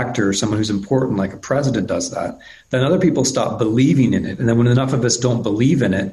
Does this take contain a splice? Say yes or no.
no